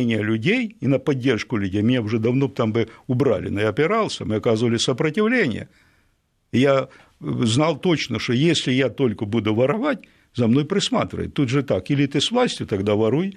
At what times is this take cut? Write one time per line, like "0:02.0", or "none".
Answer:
none